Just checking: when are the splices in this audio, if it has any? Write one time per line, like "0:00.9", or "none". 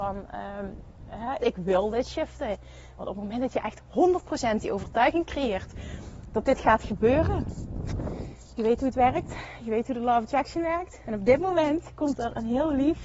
0:01.4
0:03.0
0:11.0